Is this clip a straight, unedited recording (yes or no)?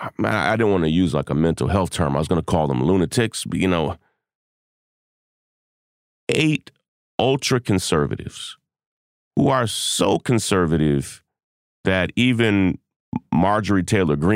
no